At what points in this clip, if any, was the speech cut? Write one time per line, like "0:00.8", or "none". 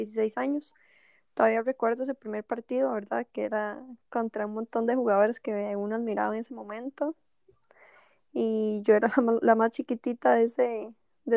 none